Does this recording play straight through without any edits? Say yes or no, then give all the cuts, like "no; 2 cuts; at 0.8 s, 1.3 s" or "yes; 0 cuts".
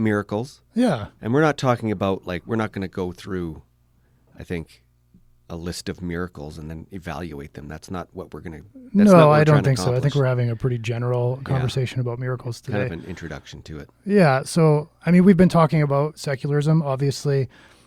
yes; 0 cuts